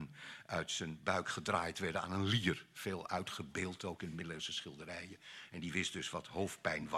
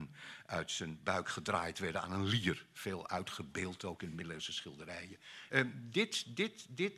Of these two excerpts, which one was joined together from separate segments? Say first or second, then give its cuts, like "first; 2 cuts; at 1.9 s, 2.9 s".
second; 1 cut; at 5.5 s